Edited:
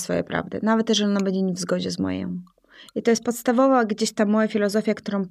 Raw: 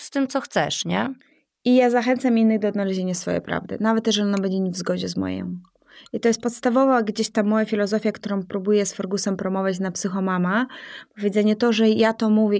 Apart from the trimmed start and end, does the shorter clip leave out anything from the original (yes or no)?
no